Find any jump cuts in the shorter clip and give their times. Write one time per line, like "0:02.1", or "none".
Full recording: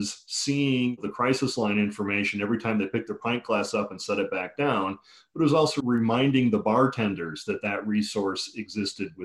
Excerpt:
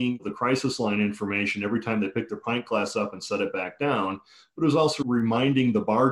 none